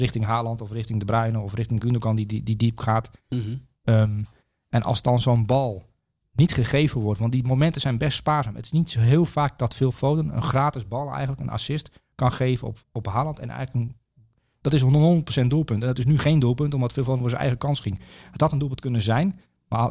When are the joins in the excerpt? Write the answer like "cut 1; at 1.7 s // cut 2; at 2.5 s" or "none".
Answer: none